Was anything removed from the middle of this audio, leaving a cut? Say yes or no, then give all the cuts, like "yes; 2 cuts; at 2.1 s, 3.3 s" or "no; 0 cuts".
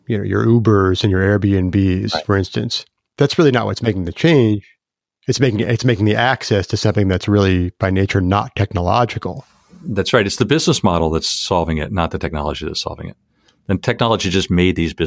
no; 0 cuts